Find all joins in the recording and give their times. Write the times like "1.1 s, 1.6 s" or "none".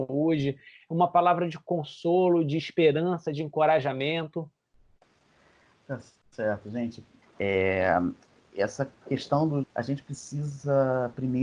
7.2 s, 9.6 s